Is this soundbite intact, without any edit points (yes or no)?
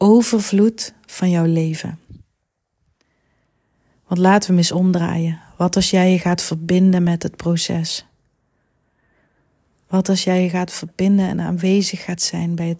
yes